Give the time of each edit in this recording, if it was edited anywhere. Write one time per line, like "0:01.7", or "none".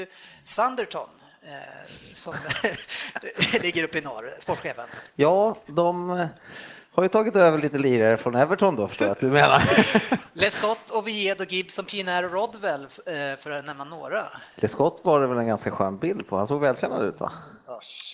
none